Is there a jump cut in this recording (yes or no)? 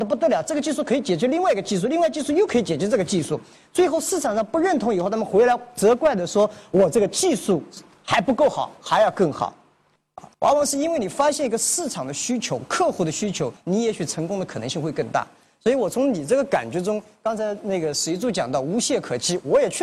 yes